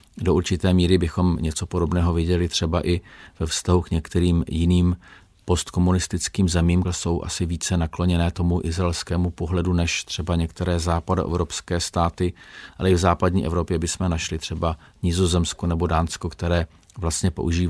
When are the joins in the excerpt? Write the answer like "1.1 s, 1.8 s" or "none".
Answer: 6.8 s